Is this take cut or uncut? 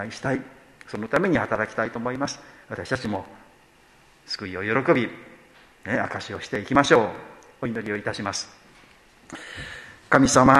uncut